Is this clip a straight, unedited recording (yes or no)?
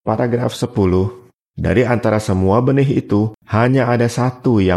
no